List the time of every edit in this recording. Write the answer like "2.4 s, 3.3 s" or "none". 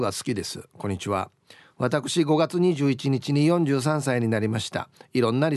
none